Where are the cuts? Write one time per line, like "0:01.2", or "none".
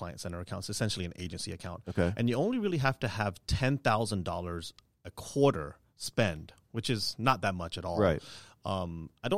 none